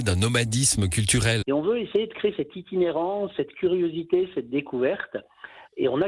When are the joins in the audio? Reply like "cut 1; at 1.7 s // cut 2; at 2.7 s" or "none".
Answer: cut 1; at 1.4 s